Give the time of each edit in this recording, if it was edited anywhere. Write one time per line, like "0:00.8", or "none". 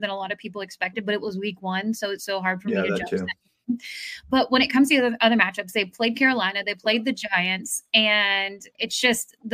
none